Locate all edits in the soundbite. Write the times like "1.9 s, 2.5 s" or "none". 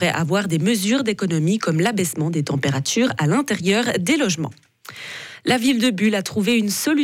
none